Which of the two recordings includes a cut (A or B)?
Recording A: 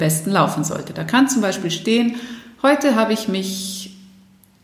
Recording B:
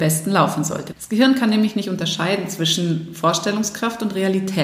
B